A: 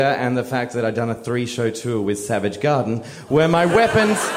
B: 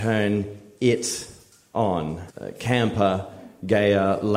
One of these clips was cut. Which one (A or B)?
B